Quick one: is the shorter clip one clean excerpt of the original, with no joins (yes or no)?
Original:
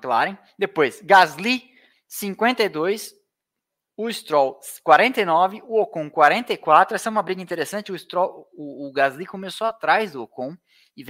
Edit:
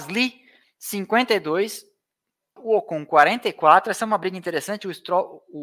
no